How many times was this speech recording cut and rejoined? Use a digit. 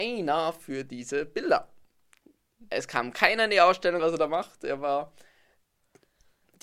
1